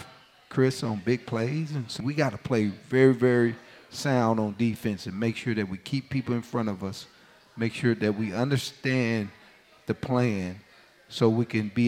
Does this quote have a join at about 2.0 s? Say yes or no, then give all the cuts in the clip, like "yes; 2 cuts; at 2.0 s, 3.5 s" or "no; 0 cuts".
yes; 1 cut; at 2.0 s